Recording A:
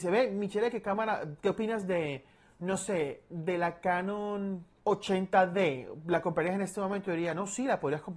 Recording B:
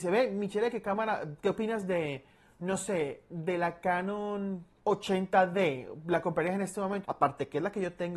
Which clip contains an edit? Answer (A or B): B